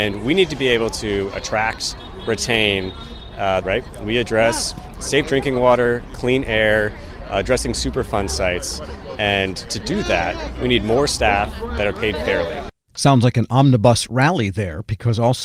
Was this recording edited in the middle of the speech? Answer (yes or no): yes